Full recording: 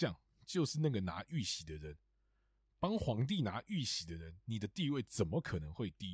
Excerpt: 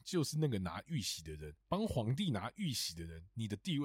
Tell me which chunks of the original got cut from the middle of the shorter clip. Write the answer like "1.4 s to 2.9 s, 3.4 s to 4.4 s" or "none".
2.0 s to 2.7 s